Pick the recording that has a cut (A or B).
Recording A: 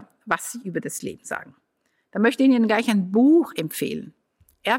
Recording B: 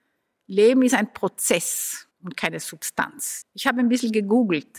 B